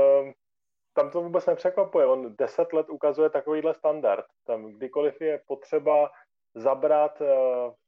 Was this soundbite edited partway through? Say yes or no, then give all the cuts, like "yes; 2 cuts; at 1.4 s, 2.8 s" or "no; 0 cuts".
no; 0 cuts